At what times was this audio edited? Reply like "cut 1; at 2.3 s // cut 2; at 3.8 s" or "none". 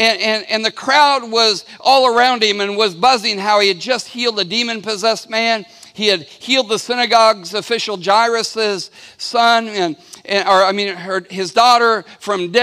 none